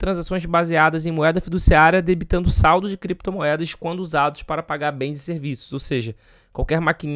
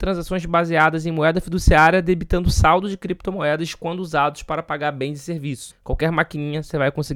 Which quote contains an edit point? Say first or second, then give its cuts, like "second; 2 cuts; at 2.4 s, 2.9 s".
second; 1 cut; at 5.7 s